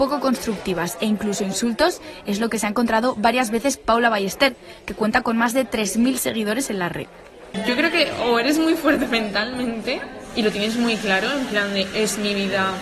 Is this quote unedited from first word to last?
yes; 0 cuts

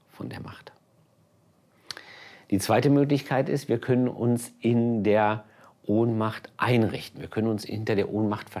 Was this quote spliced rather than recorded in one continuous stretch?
no; 0 cuts

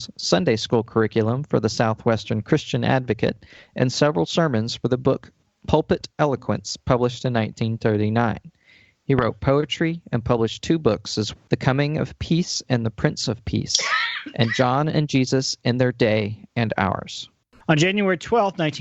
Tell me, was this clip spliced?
yes; 2 cuts; at 11.3 s, 17.6 s

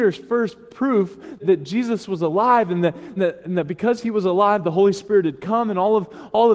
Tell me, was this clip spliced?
yes; 2 cuts; at 1.4 s, 3.2 s

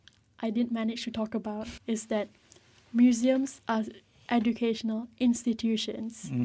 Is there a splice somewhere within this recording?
yes; 1 cut; at 1.8 s

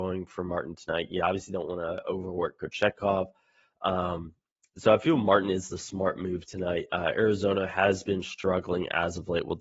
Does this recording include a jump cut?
no; 0 cuts

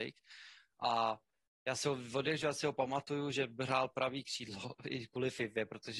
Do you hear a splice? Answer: no; 0 cuts

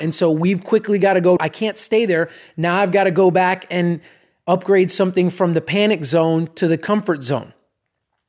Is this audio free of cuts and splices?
no; 1 cut; at 1.4 s

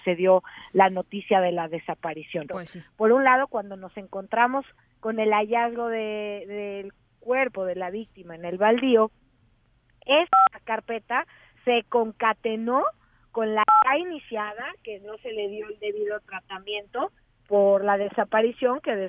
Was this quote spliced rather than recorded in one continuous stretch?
yes; 1 cut; at 2.5 s

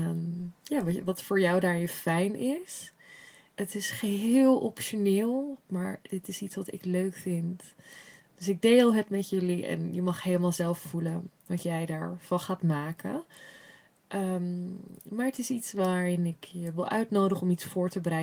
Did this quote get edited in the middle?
no; 0 cuts

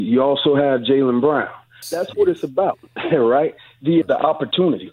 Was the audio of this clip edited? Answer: yes; 2 cuts; at 1.8 s, 4.0 s

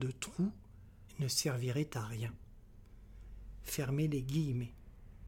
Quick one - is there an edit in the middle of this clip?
yes; 1 cut; at 1.1 s

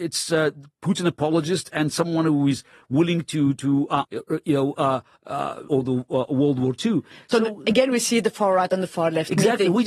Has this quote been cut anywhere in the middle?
yes; 2 cuts; at 4.0 s, 5.7 s

